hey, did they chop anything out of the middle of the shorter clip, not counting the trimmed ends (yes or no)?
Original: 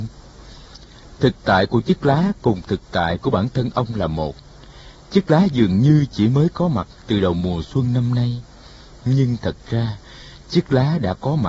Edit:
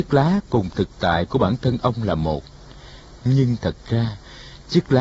yes